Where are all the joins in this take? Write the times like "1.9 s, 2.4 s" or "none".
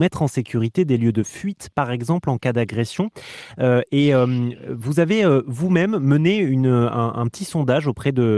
none